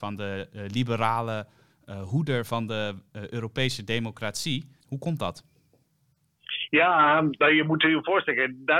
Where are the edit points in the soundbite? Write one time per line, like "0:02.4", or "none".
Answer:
0:04.8